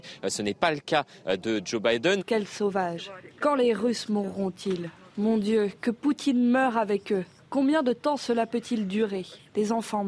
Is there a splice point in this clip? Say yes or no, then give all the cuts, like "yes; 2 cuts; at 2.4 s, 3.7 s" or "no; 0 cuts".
yes; 1 cut; at 2.2 s